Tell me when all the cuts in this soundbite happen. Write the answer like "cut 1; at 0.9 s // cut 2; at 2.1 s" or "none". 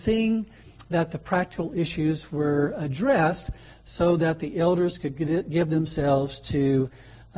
none